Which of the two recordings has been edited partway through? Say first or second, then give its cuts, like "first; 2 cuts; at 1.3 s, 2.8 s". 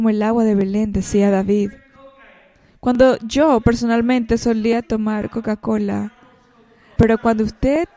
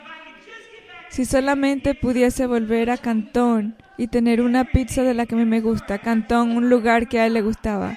first; 1 cut; at 7.0 s